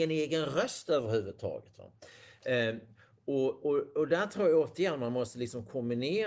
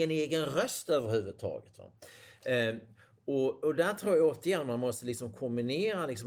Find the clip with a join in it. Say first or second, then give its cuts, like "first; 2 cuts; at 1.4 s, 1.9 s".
second; 1 cut; at 3.6 s